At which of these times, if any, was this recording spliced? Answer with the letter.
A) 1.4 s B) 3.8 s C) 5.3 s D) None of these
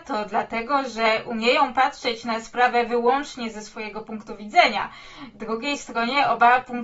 D